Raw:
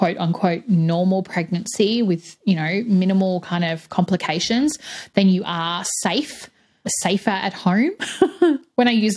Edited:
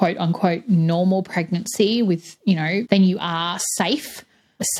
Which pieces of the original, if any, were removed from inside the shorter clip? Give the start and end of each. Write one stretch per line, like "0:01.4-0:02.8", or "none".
0:02.8-0:05.1